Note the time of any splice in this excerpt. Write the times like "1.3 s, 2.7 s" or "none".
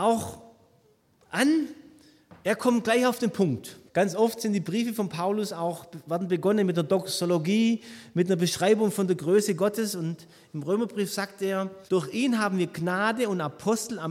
3.9 s, 11.9 s